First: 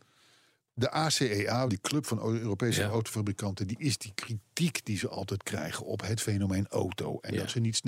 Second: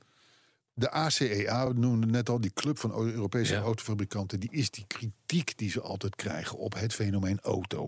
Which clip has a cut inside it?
first; 1 cut; at 1.7 s

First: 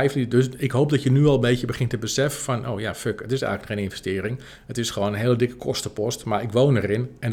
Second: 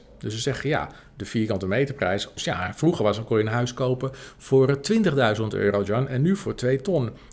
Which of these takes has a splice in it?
second; 1 cut; at 2.4 s

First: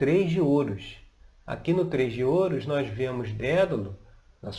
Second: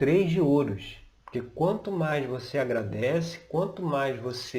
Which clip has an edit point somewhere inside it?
second; 1 cut; at 1.2 s

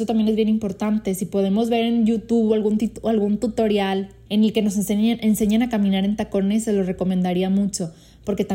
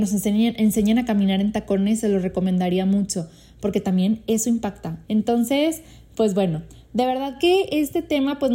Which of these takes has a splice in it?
second; 1 cut; at 5.0 s

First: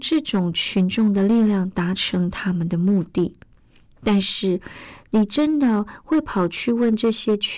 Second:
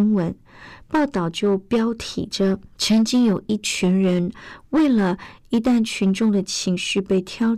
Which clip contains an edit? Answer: second; 2 cuts; at 2.7 s, 5.4 s

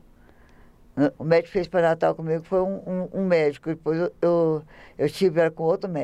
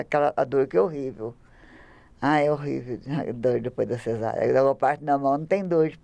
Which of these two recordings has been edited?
first; 1 cut; at 1.2 s

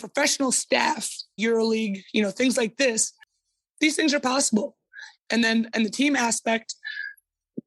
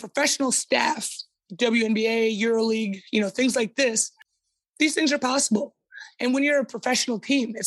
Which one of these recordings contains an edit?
first; 2 cuts; at 1.4 s, 5.2 s

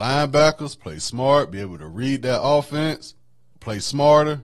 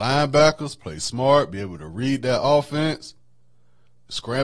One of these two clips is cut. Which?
first; 1 cut; at 3.5 s

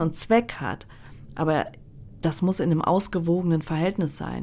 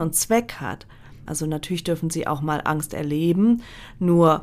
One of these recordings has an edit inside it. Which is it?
second; 1 cut; at 1.3 s

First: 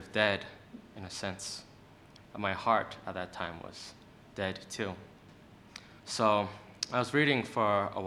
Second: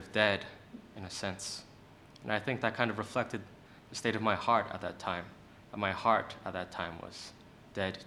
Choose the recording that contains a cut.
first; 2 cuts; at 2.2 s, 6.0 s

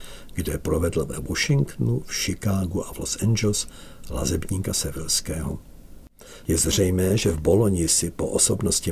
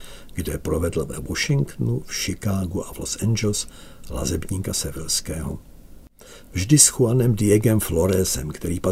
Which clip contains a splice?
first; 1 cut; at 6.4 s

